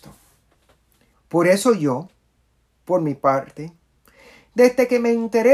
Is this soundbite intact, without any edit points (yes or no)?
no